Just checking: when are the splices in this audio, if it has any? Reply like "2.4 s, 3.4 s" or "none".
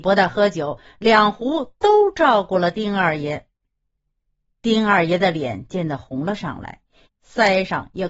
5.7 s, 7.0 s